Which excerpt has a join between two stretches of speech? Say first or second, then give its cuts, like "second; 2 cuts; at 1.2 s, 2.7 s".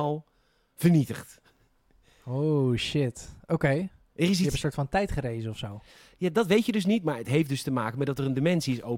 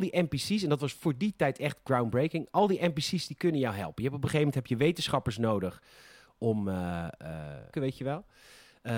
second; 1 cut; at 7.7 s